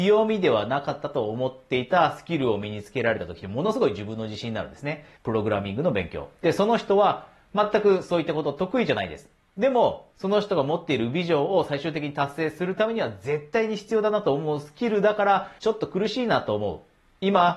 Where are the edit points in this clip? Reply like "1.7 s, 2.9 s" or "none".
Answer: 5.2 s, 10.1 s, 15.6 s